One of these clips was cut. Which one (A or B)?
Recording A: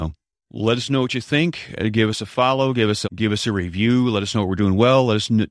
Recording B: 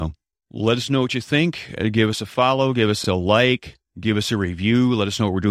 A